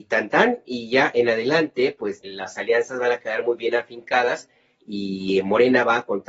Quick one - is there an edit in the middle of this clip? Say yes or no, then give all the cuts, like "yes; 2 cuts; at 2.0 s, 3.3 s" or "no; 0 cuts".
yes; 1 cut; at 2.2 s